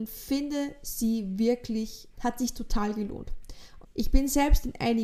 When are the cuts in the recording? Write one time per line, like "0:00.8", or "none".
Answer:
0:02.1
0:03.8